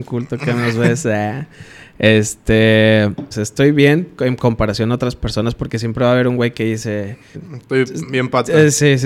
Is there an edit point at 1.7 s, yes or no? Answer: no